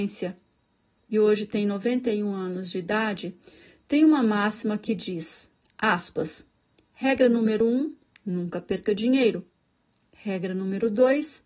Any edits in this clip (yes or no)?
no